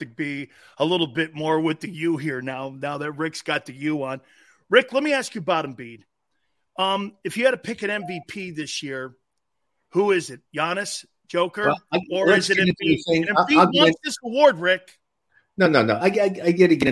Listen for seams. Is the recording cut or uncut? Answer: uncut